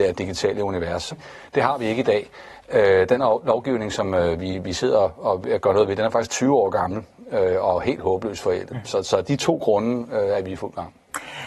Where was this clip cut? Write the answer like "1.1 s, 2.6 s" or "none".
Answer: 1.1 s